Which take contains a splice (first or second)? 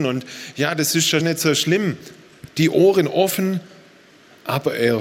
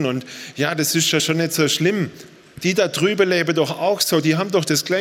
first